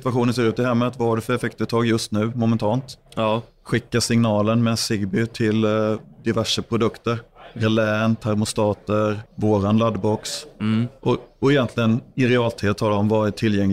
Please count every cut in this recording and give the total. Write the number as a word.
one